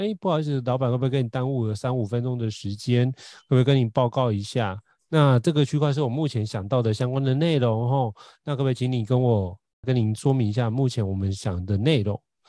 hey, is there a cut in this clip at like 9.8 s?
yes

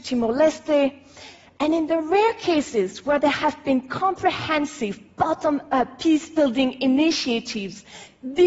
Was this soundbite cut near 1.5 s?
no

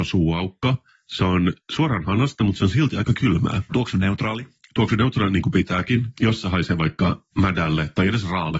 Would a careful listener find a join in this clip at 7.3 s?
yes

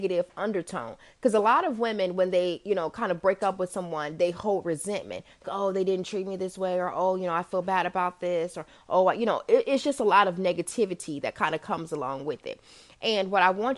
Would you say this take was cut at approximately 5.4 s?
yes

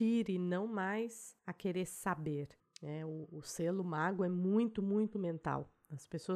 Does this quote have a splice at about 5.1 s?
yes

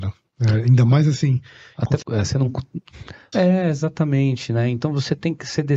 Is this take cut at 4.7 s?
no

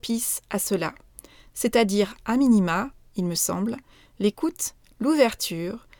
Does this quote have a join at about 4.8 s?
yes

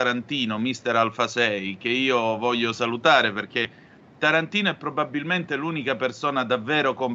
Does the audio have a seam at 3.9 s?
no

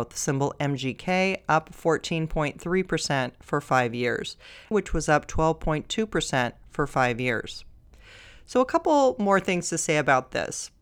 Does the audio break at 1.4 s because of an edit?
no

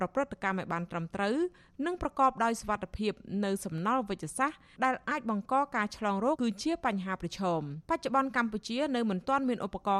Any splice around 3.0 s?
no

